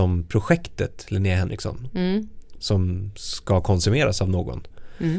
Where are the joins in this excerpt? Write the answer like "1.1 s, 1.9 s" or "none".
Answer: 2.6 s

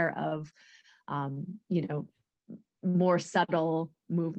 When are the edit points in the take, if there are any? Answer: none

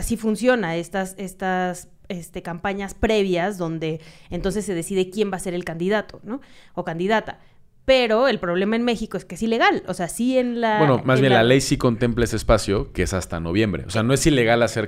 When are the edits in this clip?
none

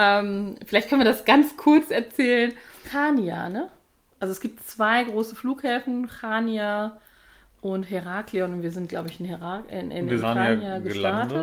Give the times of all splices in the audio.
2.8 s, 10.2 s

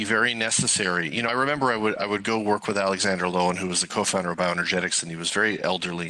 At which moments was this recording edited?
none

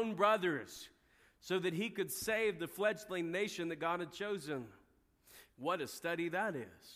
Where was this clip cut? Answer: 5.5 s

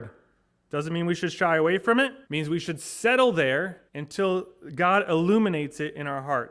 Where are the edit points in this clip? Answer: 2.2 s, 3.9 s

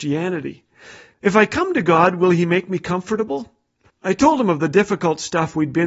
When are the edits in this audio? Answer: 1.1 s, 3.9 s

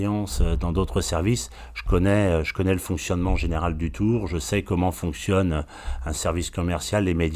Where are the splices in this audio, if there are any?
none

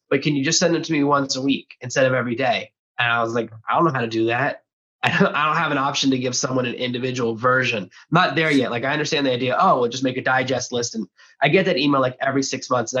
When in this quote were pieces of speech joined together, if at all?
none

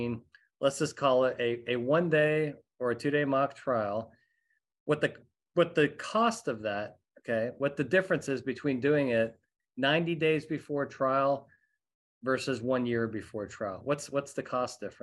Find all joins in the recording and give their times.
none

